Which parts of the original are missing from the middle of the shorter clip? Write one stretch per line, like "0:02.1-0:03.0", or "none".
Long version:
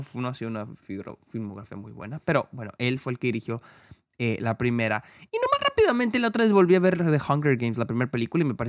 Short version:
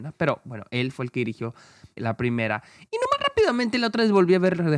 0:04.0-0:04.4